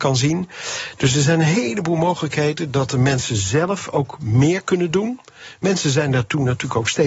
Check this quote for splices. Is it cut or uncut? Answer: uncut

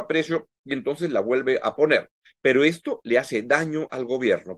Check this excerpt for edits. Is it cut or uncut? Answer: uncut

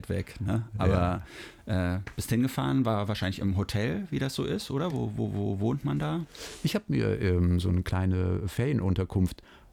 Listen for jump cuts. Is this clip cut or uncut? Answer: uncut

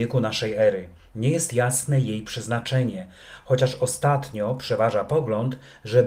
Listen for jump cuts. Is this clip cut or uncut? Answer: uncut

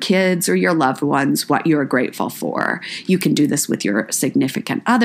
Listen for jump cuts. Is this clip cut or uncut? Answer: uncut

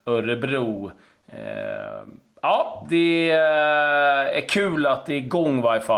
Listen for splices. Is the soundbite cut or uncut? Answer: uncut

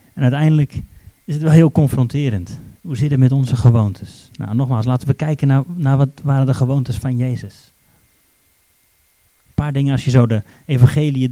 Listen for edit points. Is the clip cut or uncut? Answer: uncut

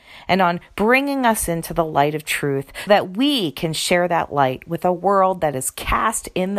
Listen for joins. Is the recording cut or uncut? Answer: cut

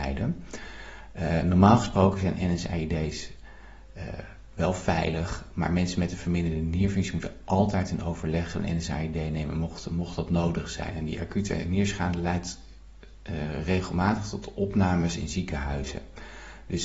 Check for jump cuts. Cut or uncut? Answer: cut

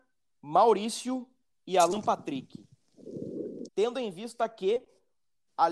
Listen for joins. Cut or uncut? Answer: cut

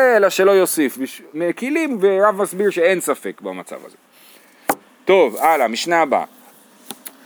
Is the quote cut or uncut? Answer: cut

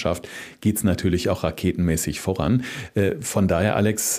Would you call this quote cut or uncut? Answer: uncut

